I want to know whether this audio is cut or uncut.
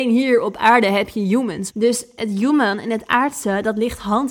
cut